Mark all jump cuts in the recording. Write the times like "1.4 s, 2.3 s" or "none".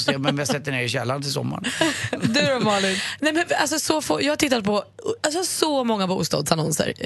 none